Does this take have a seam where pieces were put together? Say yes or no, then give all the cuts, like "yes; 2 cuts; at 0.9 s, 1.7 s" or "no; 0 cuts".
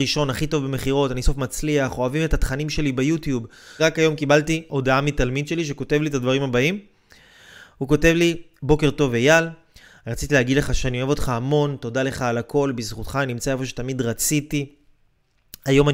yes; 2 cuts; at 1.2 s, 3.8 s